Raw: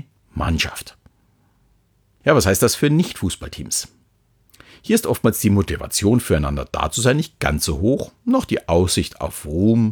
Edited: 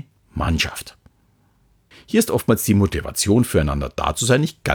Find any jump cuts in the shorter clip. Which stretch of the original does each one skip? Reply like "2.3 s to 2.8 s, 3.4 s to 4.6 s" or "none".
1.9 s to 4.7 s